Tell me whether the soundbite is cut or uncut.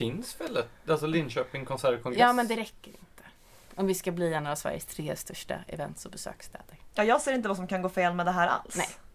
uncut